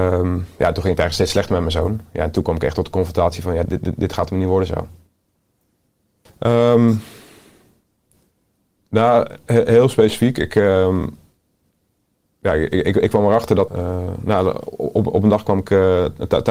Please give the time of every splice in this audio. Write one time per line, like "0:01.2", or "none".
0:03.7
0:06.3
0:13.7

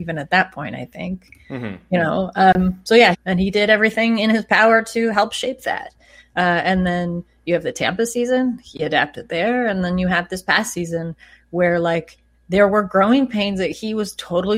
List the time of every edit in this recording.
0:03.1

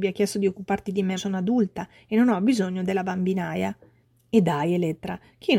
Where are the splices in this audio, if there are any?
0:01.2

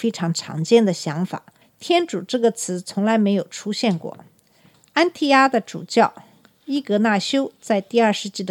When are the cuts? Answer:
none

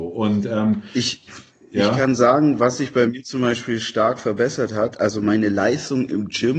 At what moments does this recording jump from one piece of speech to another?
none

